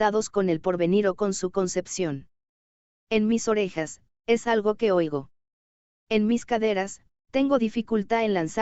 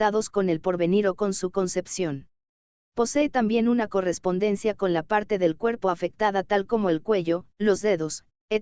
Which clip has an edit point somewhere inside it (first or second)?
second